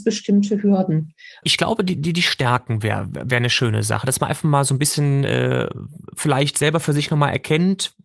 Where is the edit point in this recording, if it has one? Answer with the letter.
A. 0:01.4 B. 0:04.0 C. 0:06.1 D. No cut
A